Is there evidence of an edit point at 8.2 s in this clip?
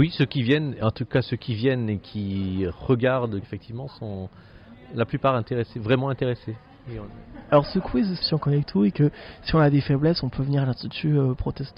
yes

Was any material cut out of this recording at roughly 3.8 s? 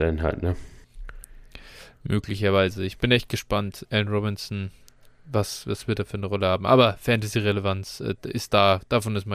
yes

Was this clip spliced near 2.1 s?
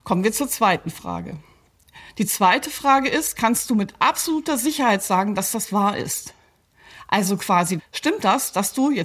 no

